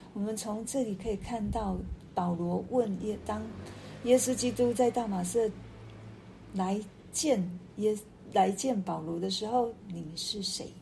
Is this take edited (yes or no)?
yes